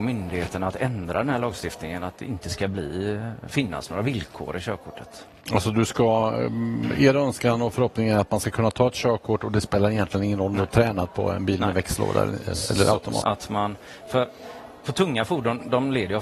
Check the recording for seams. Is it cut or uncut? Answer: cut